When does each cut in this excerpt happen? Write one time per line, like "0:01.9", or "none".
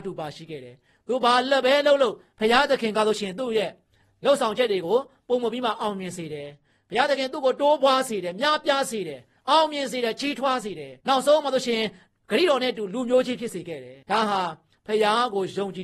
0:11.0
0:14.0